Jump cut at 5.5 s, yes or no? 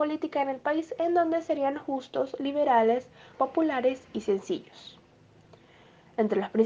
no